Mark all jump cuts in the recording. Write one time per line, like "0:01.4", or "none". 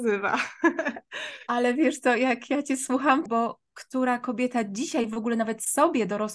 0:03.3